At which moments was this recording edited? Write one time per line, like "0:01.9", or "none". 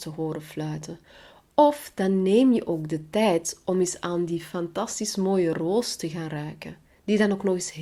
none